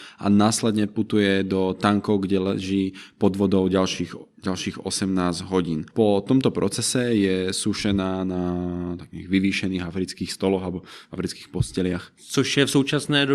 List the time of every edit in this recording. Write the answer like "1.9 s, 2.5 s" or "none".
12.1 s